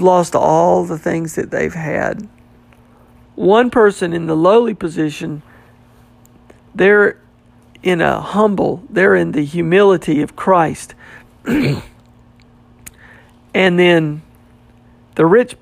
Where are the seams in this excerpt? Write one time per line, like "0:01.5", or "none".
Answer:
0:03.3